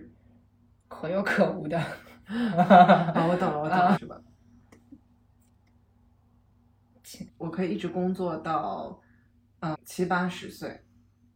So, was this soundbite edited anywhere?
yes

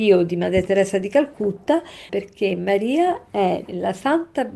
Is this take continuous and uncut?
no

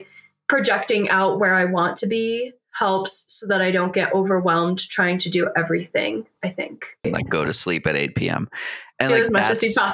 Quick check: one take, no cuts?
no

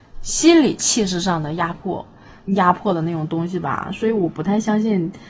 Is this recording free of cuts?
no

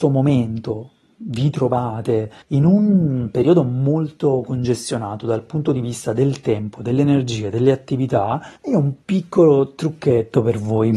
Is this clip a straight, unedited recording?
no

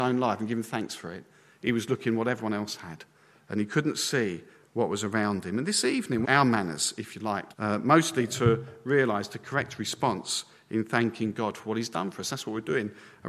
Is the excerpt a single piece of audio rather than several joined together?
no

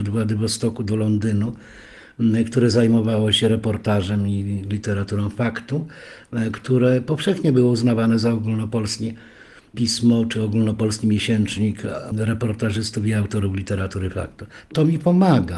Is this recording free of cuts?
yes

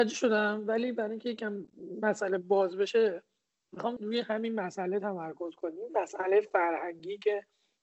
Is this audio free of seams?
no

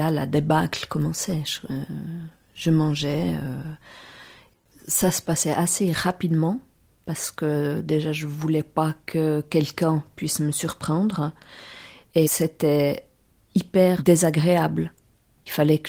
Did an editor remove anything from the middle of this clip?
no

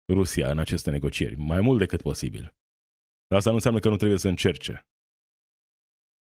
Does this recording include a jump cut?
no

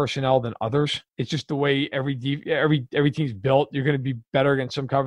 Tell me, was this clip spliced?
yes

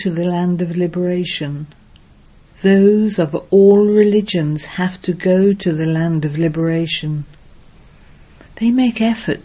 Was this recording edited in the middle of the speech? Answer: yes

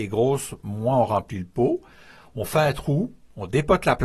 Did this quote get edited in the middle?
no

